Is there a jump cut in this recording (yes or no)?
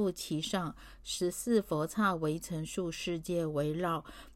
no